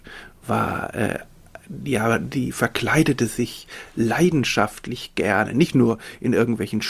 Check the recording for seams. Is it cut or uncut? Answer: uncut